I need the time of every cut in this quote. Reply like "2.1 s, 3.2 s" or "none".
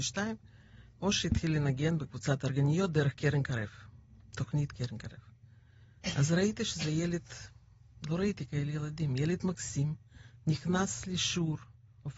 none